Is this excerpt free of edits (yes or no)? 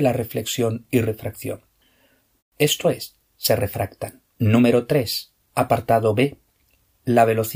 no